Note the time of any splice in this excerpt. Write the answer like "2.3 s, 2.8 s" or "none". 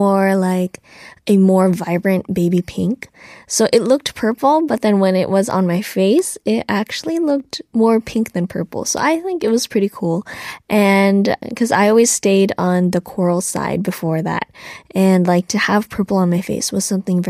11.4 s